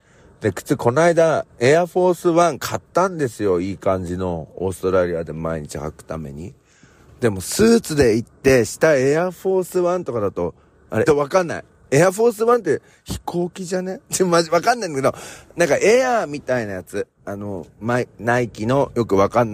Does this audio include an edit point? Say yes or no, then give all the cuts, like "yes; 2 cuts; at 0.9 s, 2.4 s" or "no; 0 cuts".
yes; 2 cuts; at 11.1 s, 17.1 s